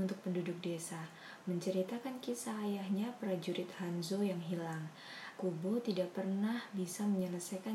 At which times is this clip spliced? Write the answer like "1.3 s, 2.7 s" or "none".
5.4 s